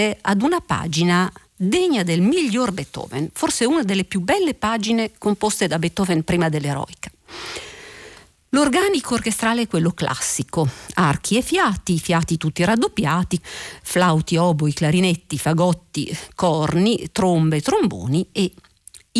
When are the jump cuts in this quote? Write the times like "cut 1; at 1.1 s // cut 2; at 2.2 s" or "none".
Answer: cut 1; at 13.4 s